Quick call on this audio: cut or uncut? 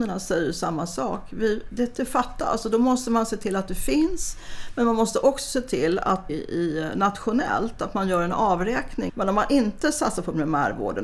cut